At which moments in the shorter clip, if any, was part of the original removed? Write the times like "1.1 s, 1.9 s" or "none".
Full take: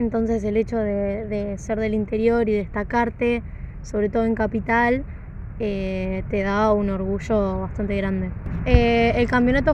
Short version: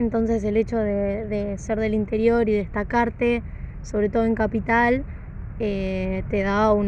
none